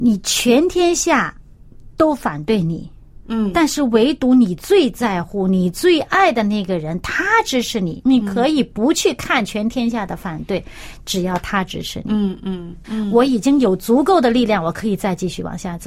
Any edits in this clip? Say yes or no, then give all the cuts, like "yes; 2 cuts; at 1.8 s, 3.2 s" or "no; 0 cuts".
yes; 2 cuts; at 8.0 s, 12.8 s